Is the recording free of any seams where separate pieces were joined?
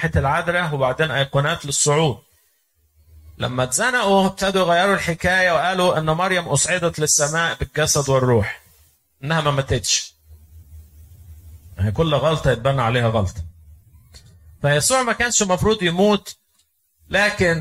yes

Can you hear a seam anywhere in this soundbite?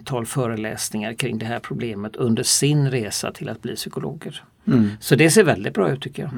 no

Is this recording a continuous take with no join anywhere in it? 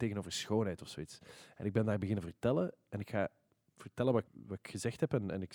no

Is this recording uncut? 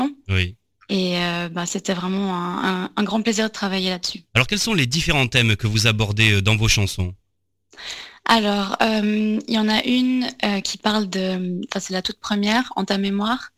yes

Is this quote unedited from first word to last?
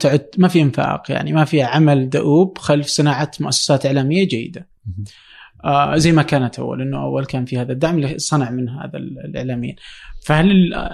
yes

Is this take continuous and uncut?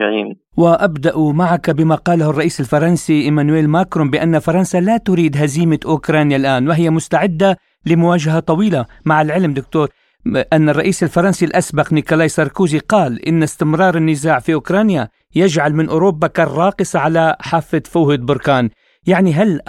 yes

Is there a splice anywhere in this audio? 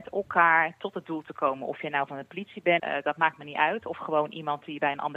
yes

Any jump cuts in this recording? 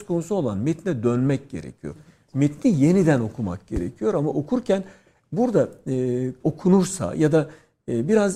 yes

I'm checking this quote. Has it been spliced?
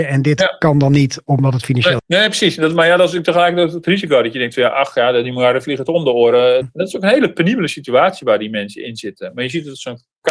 yes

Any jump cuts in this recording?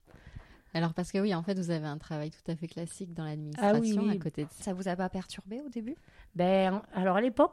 yes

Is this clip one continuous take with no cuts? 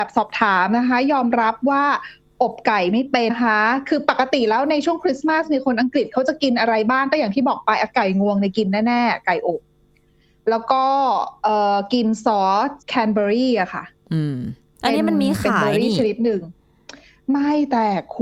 no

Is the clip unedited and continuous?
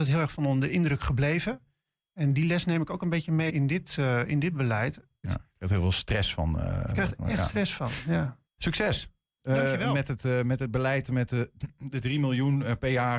no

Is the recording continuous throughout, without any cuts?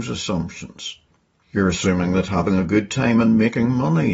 no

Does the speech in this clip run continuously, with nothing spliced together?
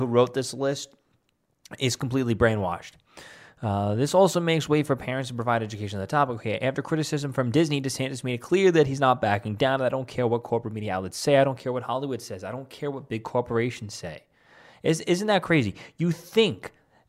yes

